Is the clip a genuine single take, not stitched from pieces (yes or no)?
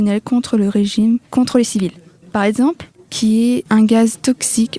no